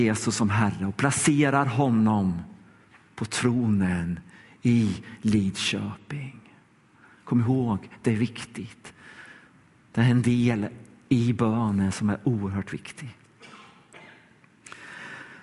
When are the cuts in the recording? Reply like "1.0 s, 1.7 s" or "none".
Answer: none

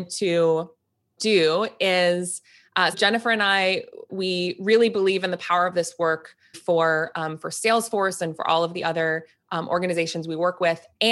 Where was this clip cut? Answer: 2.9 s, 6.5 s

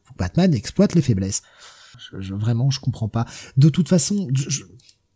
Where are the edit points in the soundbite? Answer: 1.9 s

